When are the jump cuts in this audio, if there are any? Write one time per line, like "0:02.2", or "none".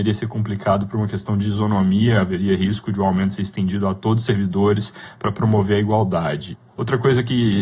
0:06.7